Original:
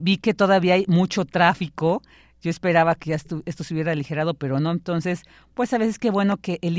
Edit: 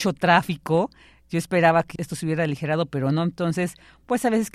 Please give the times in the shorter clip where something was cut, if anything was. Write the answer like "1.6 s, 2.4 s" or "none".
2.0 s